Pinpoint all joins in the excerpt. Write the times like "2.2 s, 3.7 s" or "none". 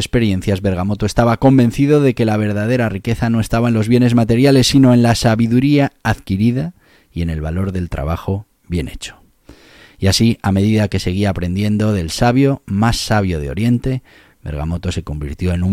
none